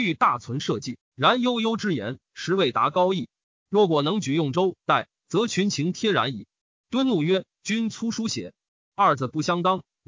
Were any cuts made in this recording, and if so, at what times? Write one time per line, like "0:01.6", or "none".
none